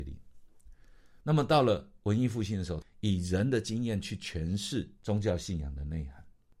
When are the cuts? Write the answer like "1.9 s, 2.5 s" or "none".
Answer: 1.2 s, 2.8 s